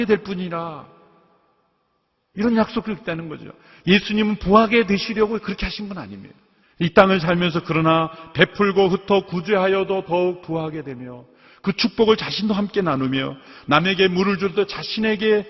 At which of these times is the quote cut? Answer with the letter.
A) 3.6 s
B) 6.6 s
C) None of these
B